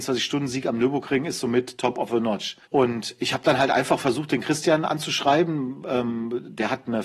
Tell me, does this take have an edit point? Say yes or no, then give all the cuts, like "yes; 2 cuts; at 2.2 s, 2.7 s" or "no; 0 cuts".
yes; 1 cut; at 2.6 s